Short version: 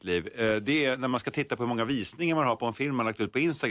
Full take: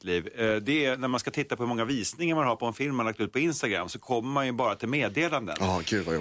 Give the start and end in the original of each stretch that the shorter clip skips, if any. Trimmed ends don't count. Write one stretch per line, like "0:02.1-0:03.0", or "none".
none